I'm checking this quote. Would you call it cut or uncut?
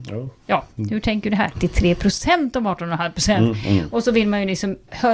cut